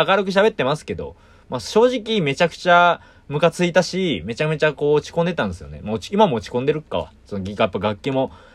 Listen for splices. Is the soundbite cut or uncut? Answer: uncut